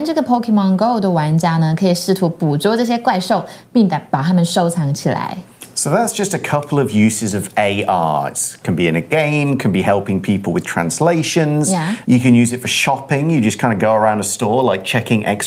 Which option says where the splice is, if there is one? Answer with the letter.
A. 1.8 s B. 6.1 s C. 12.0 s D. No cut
C